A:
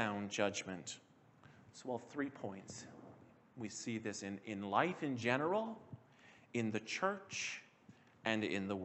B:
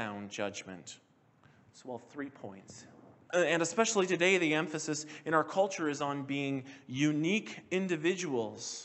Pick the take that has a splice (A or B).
B